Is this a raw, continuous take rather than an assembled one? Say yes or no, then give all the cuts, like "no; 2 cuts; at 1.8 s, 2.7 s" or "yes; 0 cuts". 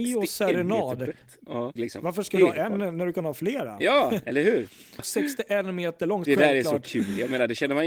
no; 3 cuts; at 1.8 s, 5.0 s, 6.3 s